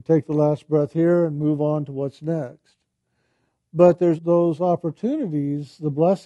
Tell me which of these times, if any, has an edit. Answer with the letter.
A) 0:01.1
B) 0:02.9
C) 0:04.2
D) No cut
C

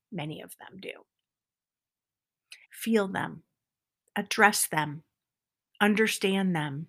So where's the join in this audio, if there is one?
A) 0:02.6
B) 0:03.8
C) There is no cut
A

